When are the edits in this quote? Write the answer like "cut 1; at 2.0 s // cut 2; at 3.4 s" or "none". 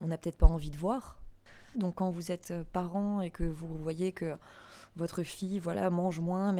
cut 1; at 1.7 s